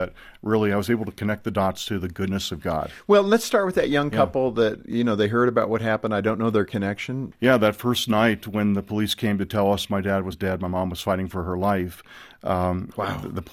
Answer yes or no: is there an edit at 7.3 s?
yes